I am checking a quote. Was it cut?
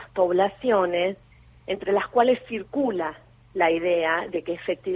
no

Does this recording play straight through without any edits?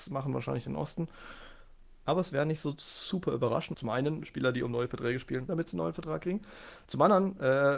no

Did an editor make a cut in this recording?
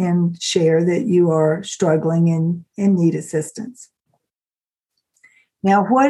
no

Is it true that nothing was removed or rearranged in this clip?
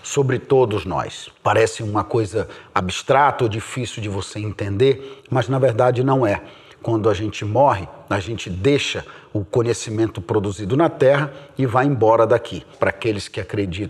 no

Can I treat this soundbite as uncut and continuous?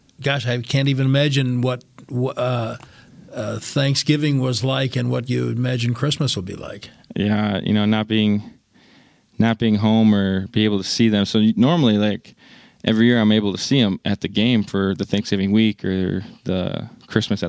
yes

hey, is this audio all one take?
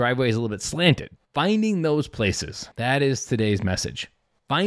no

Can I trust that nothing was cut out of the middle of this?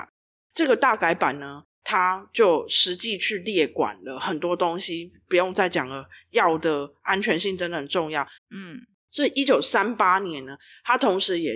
no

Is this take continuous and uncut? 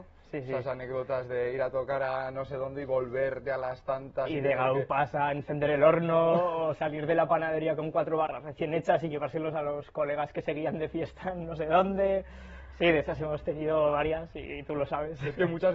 yes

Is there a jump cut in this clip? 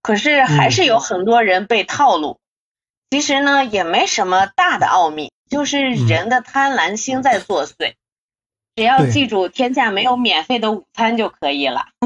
no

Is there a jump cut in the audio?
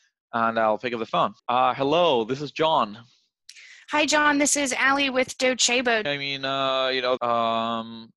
yes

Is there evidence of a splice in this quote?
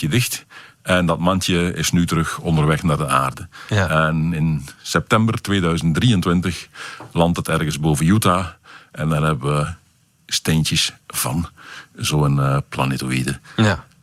no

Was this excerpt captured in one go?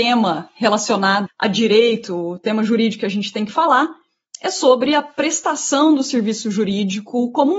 no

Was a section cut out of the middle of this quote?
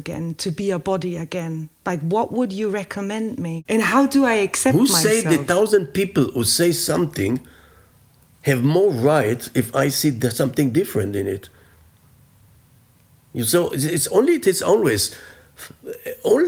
yes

